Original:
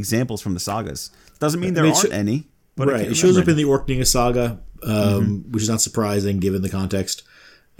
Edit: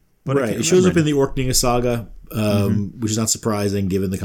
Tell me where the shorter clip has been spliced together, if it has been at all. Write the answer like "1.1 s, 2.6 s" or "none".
none